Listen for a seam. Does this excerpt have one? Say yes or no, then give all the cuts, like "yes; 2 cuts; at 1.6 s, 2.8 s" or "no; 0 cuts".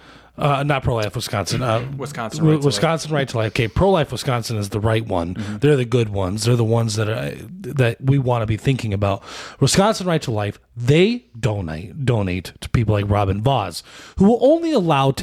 no; 0 cuts